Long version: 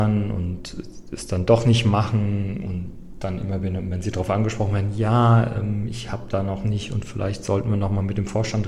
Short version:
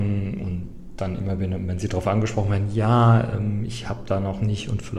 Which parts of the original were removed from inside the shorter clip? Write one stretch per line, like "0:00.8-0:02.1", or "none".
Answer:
none